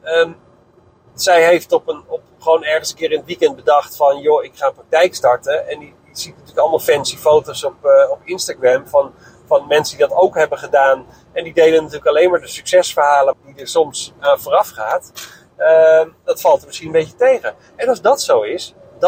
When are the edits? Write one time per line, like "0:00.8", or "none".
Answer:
0:13.3
0:16.2